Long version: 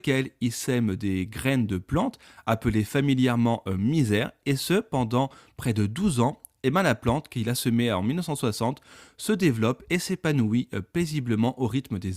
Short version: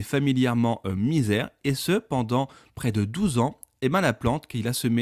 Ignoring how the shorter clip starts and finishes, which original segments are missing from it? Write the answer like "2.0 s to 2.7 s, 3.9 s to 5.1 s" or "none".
none

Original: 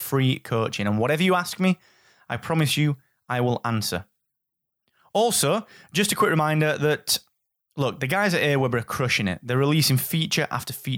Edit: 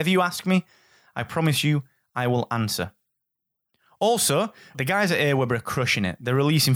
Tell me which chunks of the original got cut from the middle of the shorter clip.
5.9 s to 8.0 s

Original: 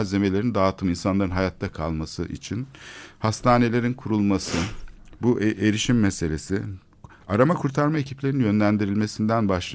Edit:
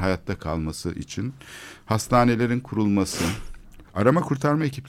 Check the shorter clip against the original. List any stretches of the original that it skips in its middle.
5.2 s to 7.2 s

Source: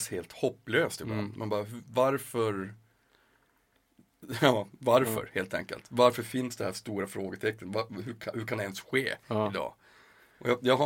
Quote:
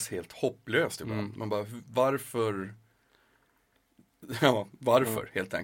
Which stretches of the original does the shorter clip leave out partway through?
none

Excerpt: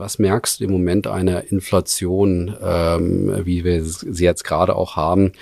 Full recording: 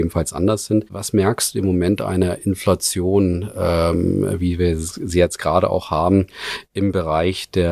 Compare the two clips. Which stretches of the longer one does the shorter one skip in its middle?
none

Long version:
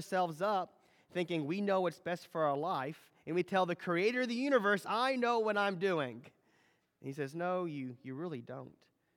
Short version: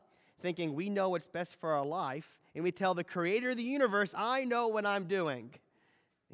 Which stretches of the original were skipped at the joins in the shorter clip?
none

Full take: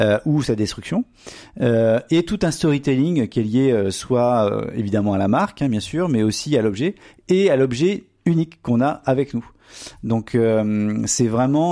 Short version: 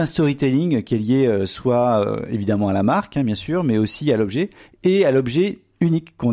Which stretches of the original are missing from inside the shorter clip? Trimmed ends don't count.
none

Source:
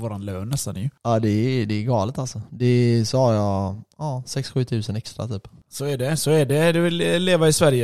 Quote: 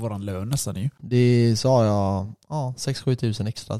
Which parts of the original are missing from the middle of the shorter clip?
1.0 s to 2.5 s

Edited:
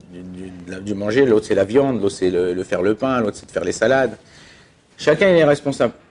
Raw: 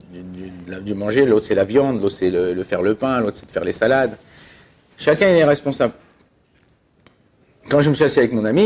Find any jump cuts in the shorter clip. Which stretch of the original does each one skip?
none

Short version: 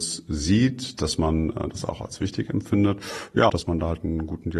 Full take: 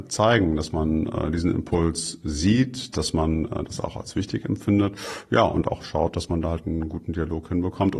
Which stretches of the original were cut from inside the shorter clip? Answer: 5.4 s to 6.1 s

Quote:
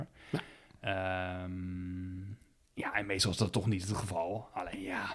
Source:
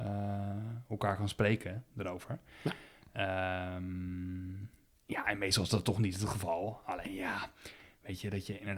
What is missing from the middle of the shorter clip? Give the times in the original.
none

